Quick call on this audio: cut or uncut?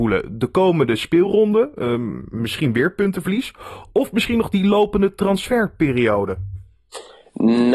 uncut